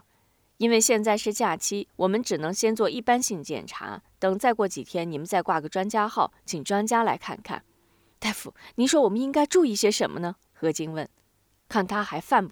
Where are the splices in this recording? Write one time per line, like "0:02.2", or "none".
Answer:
0:10.4

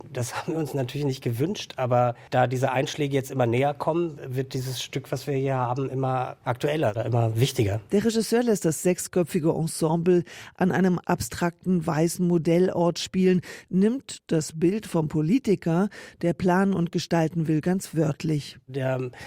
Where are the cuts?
none

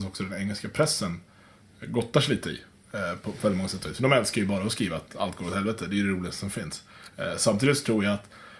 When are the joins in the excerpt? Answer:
none

